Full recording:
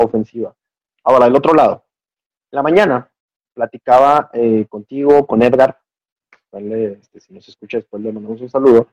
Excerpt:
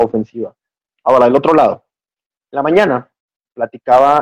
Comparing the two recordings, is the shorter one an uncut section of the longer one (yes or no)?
yes